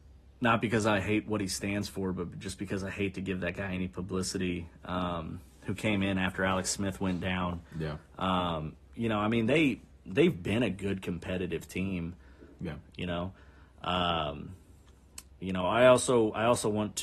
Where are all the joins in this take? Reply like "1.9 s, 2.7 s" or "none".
12.6 s